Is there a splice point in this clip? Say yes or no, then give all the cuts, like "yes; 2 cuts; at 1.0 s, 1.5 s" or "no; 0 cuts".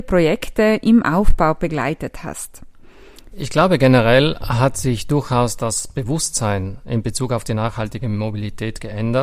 yes; 1 cut; at 3.3 s